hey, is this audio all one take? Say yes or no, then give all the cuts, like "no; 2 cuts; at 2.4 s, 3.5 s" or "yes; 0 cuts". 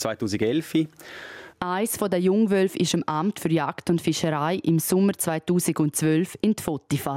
no; 1 cut; at 1.5 s